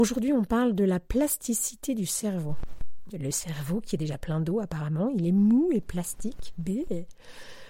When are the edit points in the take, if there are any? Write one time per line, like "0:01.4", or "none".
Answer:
0:03.1